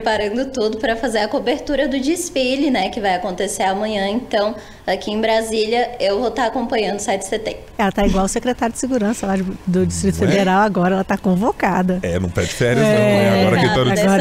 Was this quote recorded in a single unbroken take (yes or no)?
yes